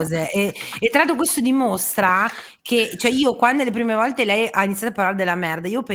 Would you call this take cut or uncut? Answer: uncut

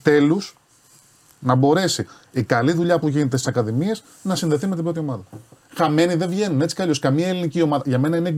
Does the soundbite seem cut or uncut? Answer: uncut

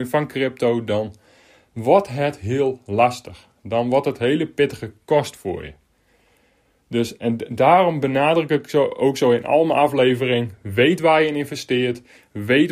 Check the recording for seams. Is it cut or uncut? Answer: uncut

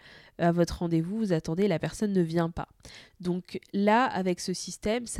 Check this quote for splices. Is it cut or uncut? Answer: cut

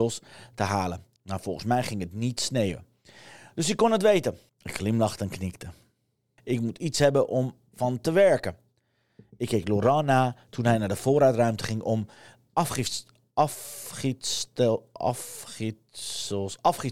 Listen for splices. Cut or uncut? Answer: cut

